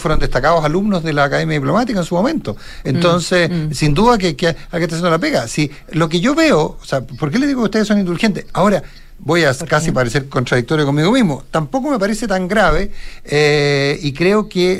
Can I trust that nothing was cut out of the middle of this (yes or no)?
yes